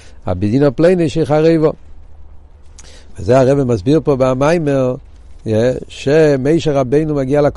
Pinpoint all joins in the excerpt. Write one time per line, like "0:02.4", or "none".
none